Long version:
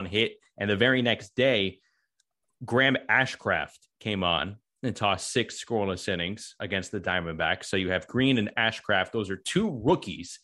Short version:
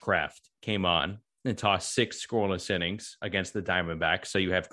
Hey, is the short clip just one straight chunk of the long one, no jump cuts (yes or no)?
yes